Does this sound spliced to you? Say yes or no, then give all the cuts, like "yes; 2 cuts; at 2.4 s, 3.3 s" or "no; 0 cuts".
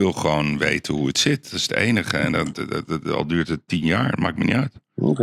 yes; 1 cut; at 2.5 s